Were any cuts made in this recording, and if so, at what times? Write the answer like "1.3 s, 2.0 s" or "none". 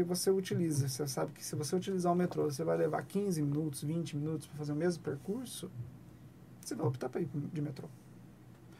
none